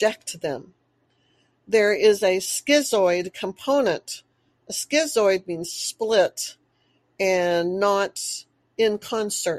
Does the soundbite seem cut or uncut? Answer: uncut